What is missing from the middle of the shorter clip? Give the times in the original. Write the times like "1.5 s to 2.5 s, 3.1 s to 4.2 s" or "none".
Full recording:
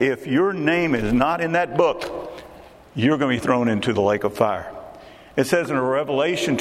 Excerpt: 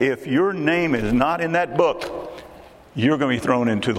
none